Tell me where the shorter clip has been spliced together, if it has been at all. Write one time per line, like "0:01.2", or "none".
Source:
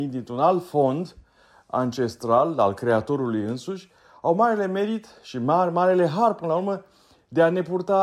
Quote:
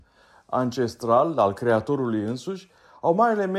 none